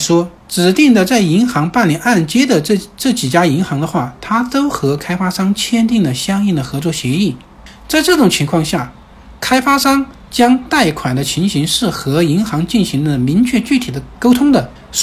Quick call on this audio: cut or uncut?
uncut